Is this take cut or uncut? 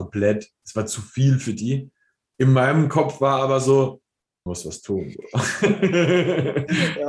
cut